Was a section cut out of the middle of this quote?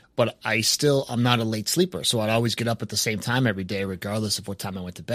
no; 0 cuts

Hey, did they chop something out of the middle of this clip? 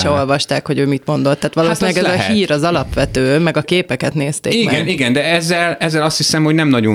no; 0 cuts

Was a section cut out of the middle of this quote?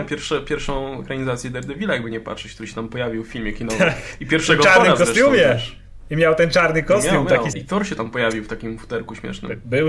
yes; 1 cut; at 7.5 s

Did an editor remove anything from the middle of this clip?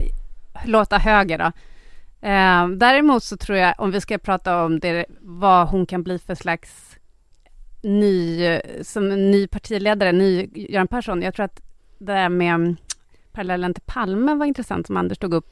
no; 0 cuts

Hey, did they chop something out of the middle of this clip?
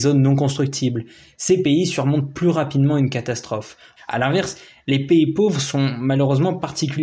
yes; 1 cut; at 4.0 s

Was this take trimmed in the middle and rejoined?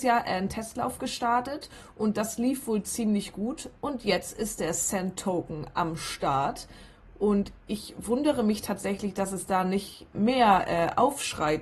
yes; 1 cut; at 10.1 s

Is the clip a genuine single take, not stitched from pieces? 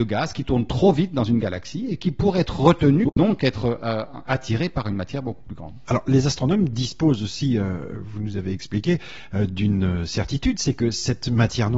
yes; 0 cuts

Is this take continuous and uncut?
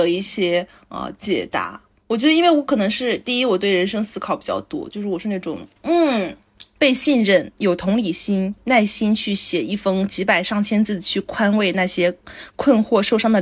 no; 2 cuts; at 6.8 s, 8.6 s

